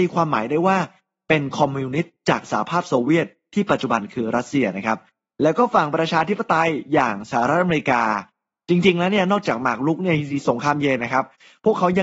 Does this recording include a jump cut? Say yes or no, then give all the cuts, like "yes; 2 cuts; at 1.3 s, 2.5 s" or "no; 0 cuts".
no; 0 cuts